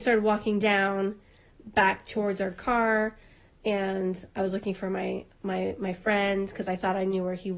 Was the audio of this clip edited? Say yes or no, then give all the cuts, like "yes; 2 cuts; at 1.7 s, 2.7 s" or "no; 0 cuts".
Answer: no; 0 cuts